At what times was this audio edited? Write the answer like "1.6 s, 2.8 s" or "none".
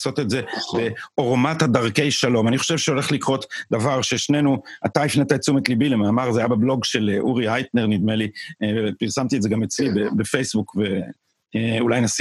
none

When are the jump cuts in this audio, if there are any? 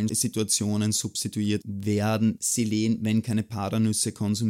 none

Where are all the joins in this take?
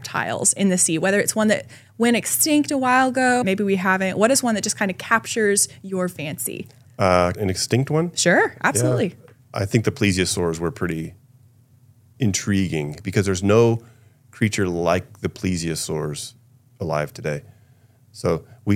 3.4 s, 7.3 s, 9.4 s

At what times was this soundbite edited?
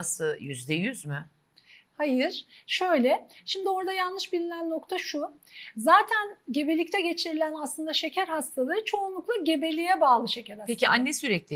none

